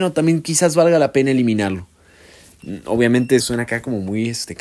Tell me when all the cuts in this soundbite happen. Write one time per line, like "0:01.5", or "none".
0:03.4